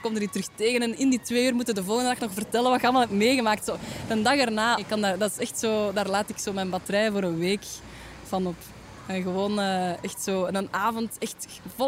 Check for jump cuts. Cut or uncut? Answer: cut